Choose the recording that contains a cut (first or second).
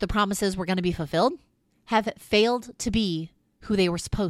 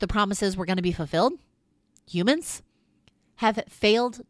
first